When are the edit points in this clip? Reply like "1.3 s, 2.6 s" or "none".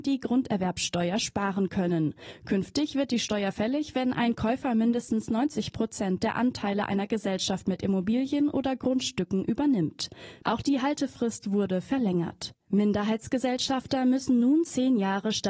10.4 s, 12.6 s